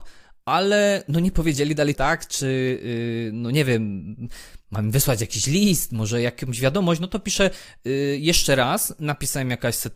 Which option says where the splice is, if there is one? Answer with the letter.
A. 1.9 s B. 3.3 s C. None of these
A